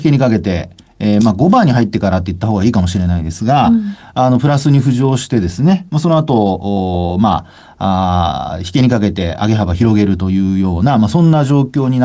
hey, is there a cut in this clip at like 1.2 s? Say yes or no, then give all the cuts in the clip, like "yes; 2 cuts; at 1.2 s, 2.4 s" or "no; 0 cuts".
no; 0 cuts